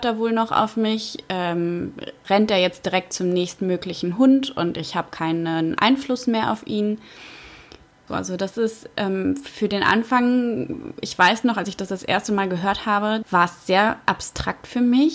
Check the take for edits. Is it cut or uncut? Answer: cut